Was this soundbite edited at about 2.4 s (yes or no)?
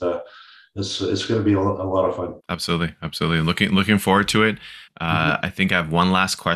yes